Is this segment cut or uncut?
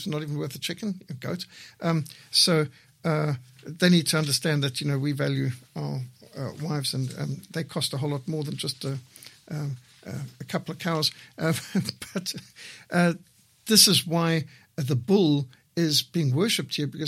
uncut